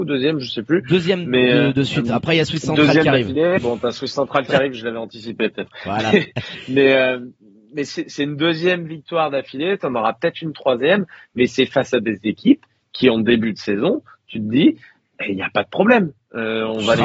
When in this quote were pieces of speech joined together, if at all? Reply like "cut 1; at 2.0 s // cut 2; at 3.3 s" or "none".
none